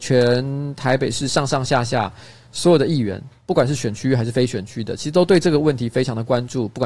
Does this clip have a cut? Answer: no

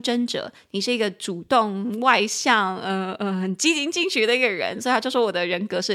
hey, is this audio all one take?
yes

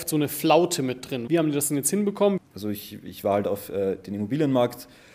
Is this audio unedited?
no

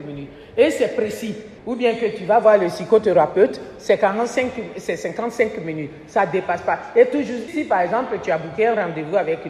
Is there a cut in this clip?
yes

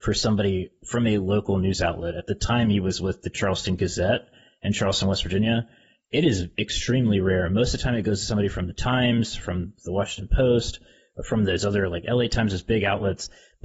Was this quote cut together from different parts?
no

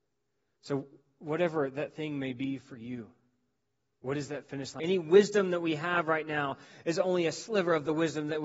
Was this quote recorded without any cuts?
no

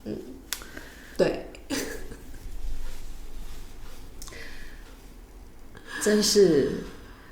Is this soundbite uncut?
no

